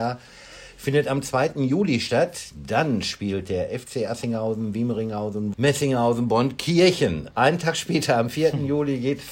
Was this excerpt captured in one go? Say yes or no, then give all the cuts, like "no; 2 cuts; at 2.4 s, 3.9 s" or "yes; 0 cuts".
no; 2 cuts; at 5.5 s, 7.3 s